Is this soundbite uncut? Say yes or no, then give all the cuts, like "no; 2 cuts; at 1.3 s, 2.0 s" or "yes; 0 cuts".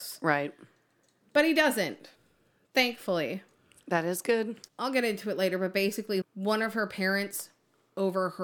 no; 2 cuts; at 4.7 s, 6.2 s